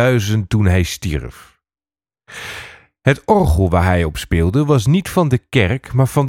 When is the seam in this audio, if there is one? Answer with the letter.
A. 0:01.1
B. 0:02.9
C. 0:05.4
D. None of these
D